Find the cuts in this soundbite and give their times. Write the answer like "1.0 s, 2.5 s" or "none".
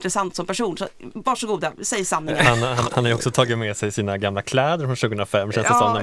2.8 s

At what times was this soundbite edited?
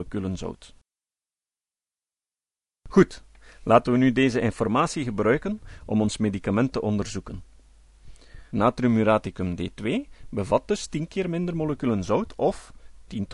8.5 s

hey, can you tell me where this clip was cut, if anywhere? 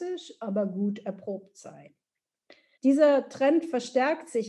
2.8 s

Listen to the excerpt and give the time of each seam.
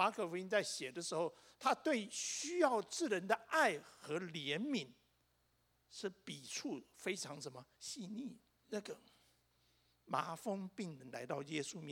8.6 s

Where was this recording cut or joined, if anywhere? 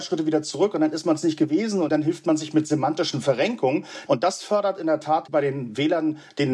4.1 s

